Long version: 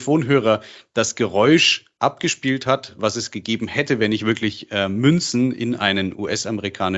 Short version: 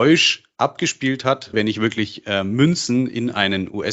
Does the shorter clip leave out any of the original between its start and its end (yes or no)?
yes